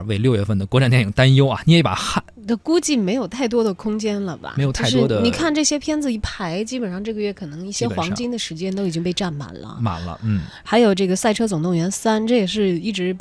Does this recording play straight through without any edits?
yes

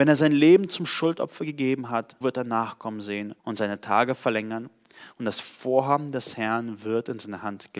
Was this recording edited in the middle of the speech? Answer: yes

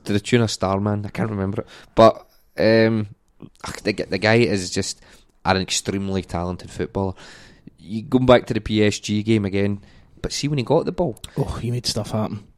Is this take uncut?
no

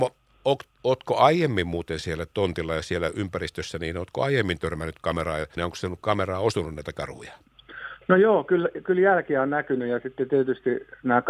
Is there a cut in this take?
yes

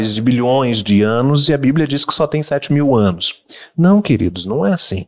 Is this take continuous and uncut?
yes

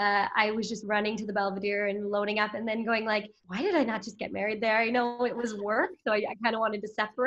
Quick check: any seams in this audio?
yes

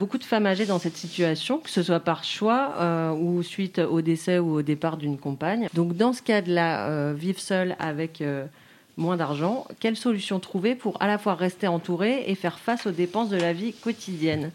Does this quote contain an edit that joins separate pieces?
yes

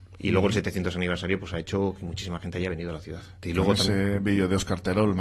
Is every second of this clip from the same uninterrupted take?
no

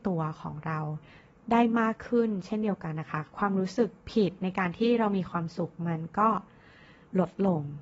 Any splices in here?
no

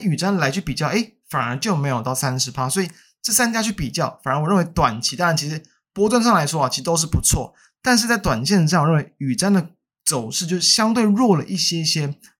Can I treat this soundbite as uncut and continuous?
yes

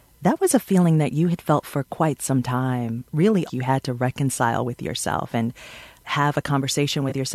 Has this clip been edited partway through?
yes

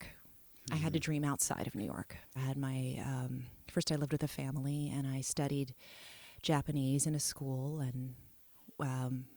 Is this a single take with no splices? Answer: no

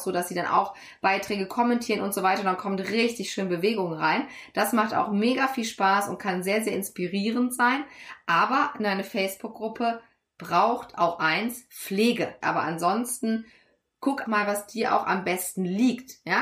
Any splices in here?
yes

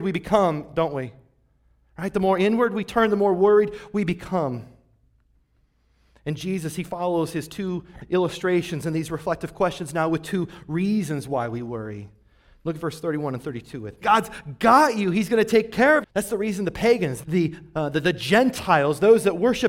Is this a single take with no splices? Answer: no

